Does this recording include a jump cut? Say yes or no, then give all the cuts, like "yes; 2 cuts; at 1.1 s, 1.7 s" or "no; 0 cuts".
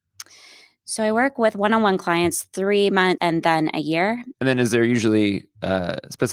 yes; 2 cuts; at 3.2 s, 4.3 s